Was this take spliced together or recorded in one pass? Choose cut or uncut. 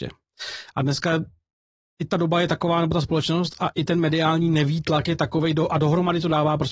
uncut